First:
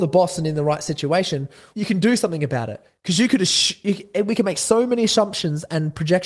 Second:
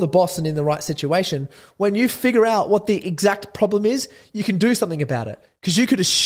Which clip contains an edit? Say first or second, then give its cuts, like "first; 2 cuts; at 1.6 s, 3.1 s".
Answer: first; 1 cut; at 1.7 s